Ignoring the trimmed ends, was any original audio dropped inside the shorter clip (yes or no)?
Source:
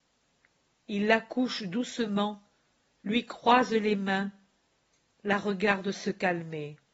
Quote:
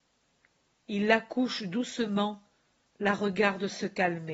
yes